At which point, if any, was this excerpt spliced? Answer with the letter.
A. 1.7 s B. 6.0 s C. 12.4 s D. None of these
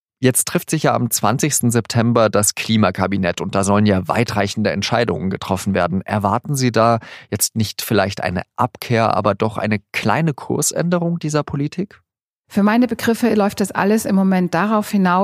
D